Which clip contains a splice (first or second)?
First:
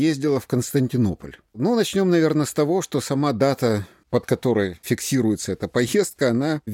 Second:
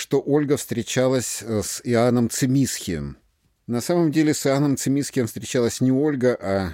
first